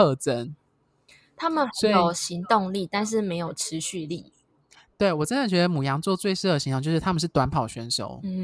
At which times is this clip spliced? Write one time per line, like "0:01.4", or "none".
none